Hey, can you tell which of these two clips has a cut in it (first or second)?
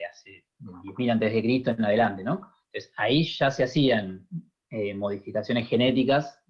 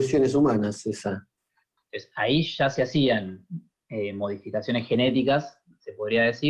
second